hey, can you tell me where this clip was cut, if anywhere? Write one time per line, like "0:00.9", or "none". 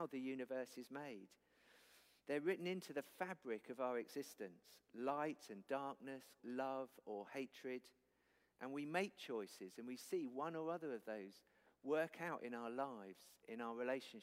0:06.4